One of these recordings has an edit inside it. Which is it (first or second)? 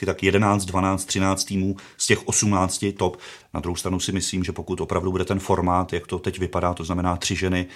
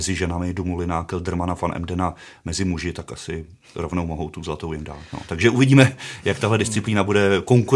first